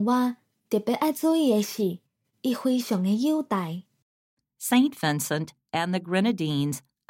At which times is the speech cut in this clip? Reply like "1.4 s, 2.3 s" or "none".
2.3 s